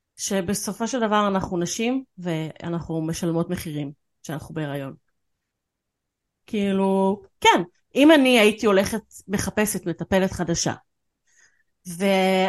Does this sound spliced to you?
yes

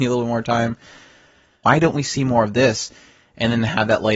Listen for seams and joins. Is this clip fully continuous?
no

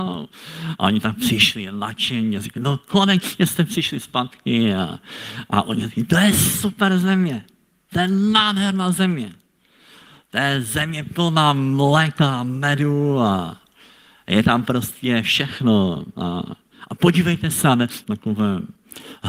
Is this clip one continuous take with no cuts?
no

